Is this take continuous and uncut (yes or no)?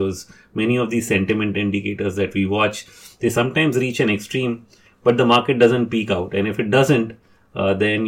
yes